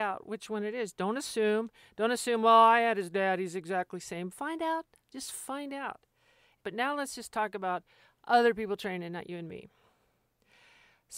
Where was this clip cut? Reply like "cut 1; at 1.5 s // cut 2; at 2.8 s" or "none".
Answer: cut 1; at 6.6 s

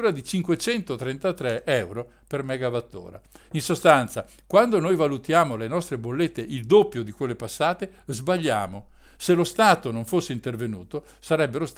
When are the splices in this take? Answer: none

